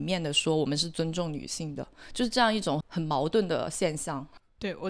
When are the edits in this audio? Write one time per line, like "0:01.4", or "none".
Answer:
0:02.8